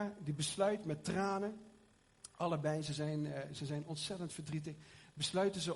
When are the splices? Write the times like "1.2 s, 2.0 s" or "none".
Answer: none